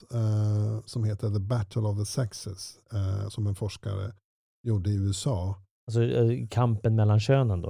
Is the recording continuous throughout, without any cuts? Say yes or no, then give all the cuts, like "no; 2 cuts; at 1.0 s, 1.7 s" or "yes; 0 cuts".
yes; 0 cuts